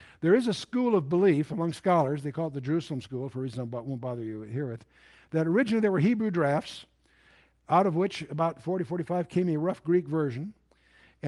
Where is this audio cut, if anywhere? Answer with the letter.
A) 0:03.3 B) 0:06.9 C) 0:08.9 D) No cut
D